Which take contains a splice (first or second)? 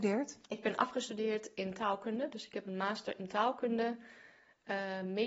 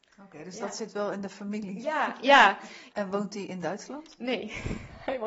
second